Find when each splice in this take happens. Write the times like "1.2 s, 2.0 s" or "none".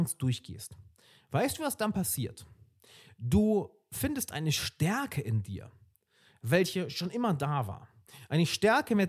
none

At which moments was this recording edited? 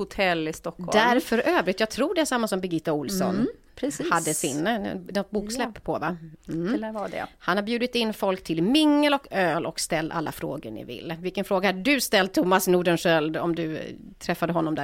none

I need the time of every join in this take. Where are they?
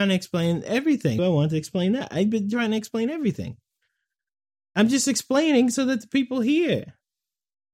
1.2 s

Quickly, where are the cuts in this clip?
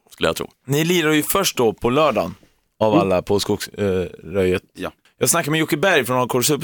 none

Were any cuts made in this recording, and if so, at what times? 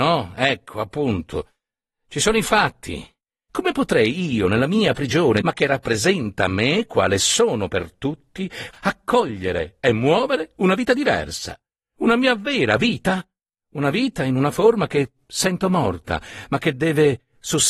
3.5 s, 5.4 s, 8.7 s

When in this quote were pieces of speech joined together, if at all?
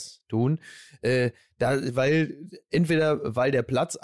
none

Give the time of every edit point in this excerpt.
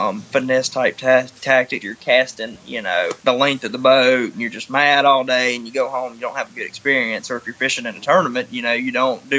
1.8 s, 3.2 s

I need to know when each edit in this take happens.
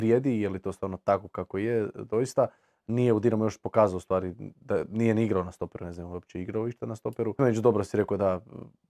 7.4 s

